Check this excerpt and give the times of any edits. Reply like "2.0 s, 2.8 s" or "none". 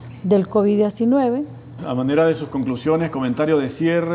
1.8 s